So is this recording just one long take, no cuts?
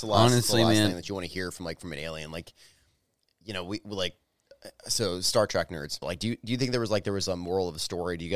no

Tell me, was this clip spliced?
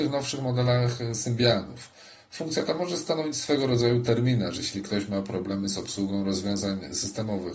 no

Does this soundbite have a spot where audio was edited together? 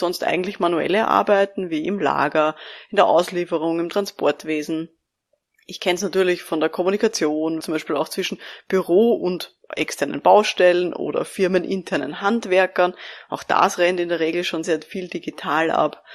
yes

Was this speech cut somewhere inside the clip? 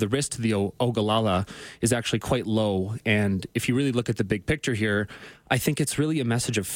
no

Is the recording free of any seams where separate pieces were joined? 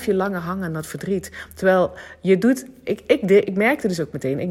yes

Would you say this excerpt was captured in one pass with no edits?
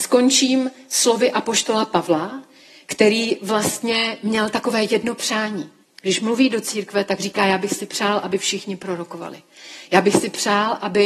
no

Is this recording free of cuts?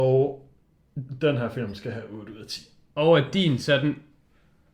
yes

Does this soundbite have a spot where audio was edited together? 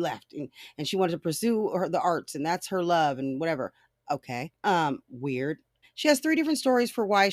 yes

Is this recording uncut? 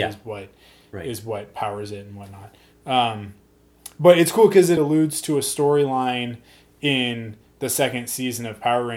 no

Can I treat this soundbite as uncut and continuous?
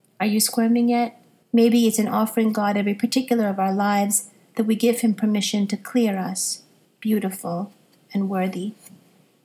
no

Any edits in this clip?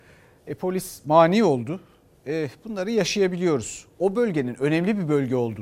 no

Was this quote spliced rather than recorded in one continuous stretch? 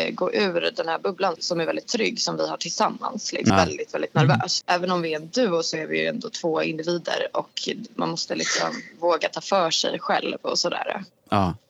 yes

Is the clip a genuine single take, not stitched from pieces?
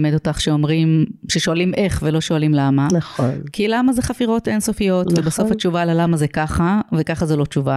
yes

